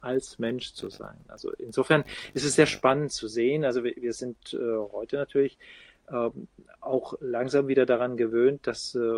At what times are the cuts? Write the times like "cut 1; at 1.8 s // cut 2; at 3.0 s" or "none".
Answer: none